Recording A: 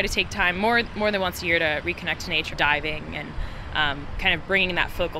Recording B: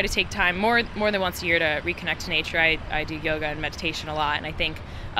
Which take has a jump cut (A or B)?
A